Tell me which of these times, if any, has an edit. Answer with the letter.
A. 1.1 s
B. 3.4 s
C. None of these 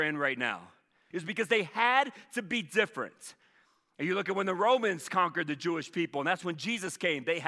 A